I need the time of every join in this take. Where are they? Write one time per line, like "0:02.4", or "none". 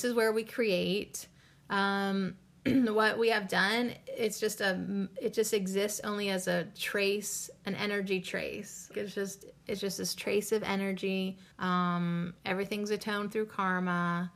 0:08.9
0:11.5